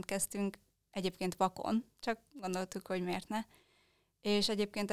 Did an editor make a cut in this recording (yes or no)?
no